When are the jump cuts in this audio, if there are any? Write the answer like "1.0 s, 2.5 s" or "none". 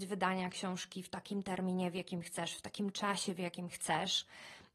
none